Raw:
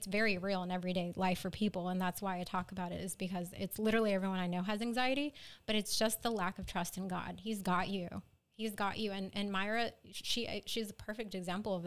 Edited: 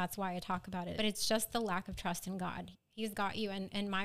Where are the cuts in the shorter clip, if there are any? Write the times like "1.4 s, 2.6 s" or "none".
0.9 s, 2.7 s